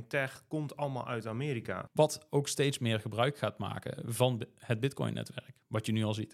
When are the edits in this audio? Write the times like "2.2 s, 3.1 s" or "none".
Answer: 1.9 s